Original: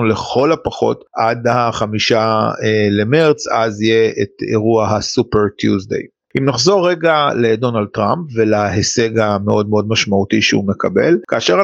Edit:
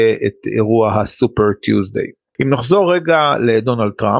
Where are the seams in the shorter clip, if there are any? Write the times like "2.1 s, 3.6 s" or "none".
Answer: none